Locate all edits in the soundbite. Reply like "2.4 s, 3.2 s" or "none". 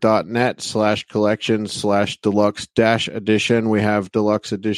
none